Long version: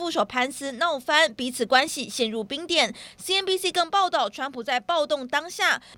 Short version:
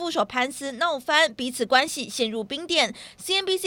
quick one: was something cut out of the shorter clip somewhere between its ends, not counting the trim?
no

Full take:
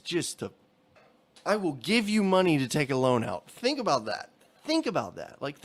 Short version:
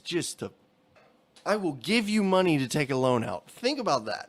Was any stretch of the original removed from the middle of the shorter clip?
no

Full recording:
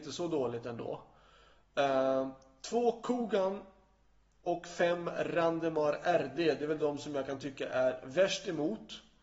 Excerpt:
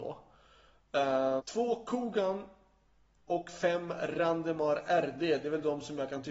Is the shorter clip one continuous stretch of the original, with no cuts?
no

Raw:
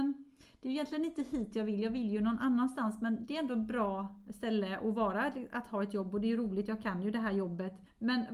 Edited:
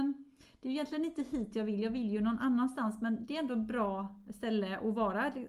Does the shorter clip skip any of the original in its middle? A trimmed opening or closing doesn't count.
no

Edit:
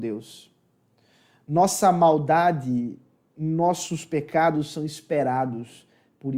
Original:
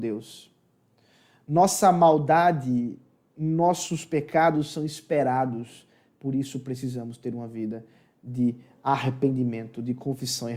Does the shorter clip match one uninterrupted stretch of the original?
yes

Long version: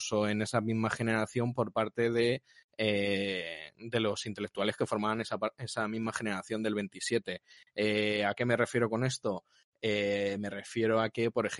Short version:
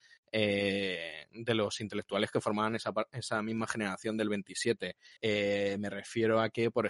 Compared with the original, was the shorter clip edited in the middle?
yes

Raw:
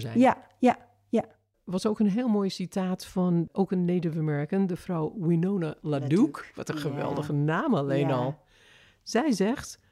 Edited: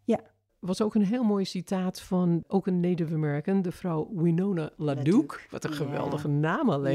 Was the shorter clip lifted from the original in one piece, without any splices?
yes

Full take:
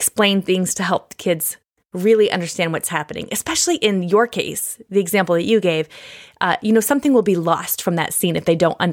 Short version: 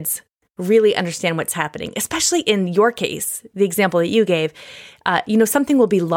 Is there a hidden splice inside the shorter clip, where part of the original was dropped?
no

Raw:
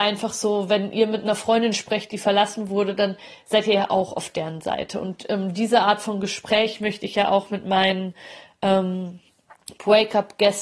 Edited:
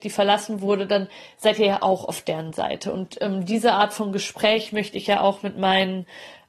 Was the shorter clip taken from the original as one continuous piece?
yes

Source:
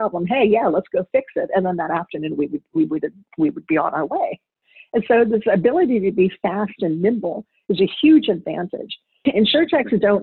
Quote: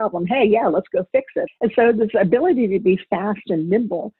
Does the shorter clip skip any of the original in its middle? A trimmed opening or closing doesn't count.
yes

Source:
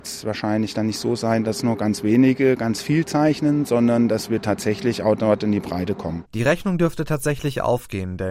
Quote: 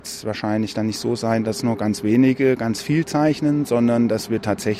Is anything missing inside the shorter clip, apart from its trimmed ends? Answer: no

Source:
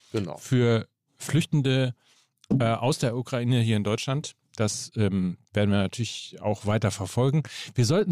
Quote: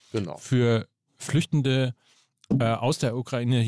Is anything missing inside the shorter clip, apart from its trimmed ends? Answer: no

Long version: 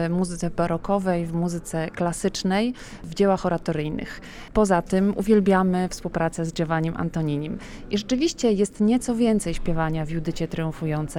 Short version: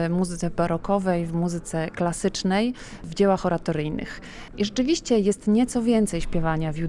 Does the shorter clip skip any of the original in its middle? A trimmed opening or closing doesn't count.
yes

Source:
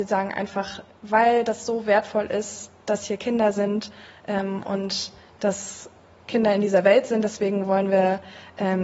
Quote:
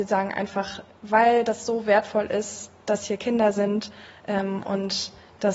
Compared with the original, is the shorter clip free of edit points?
yes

